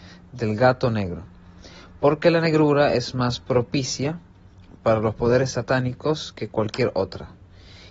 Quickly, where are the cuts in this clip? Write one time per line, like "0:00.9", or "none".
none